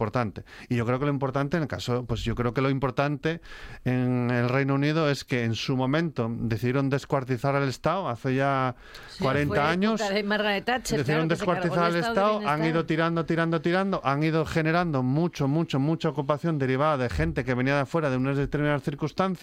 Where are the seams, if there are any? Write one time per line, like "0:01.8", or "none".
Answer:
none